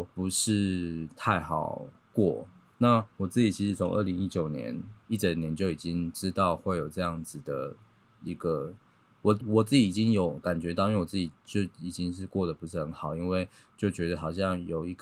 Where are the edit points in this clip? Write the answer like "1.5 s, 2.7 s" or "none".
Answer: 9.4 s